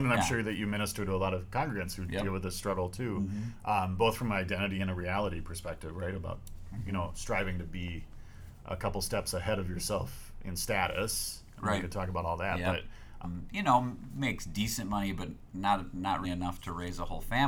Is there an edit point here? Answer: yes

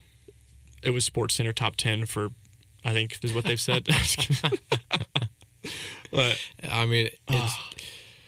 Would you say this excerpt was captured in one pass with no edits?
no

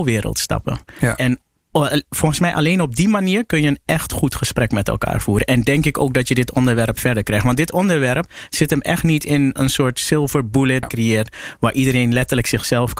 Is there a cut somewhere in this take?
yes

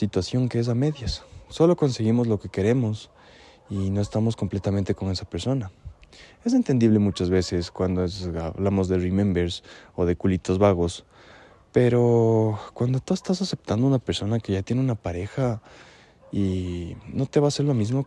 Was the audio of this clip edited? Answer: no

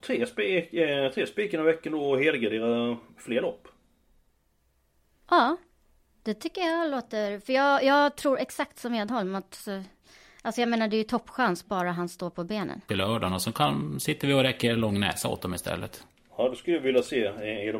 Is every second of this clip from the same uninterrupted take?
no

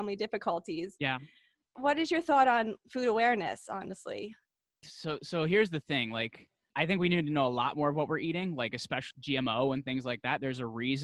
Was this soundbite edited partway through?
yes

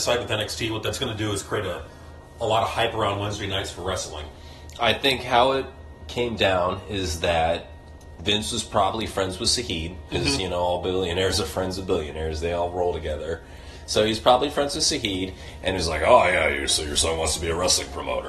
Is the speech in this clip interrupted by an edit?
no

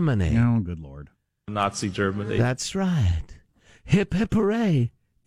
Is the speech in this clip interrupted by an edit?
no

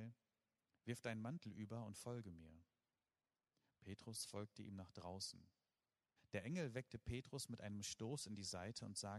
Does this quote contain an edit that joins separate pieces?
yes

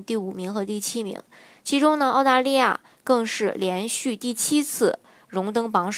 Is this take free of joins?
yes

